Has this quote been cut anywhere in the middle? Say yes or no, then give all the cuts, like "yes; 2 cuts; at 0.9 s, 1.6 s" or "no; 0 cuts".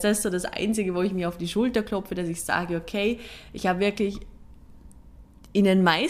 no; 0 cuts